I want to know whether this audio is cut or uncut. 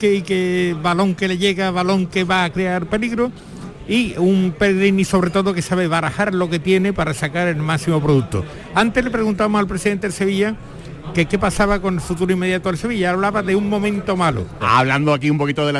cut